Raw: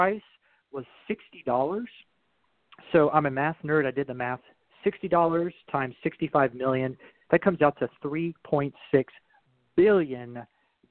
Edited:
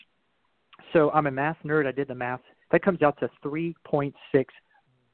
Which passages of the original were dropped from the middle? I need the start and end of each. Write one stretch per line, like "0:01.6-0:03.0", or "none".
0:04.6-0:07.2